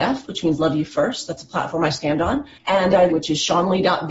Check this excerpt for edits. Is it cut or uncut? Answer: cut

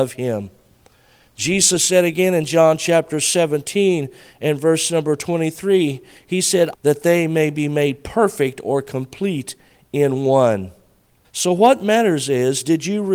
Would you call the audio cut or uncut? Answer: cut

